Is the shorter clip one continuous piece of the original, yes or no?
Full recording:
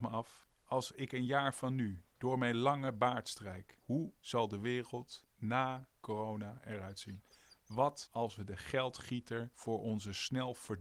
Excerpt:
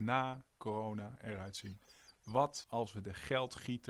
yes